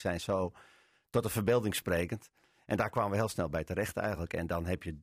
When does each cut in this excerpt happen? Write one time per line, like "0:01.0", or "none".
none